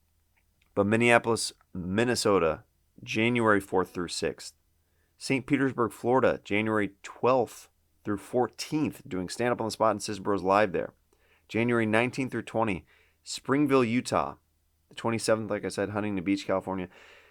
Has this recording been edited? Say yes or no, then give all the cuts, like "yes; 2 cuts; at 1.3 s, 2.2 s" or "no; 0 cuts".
no; 0 cuts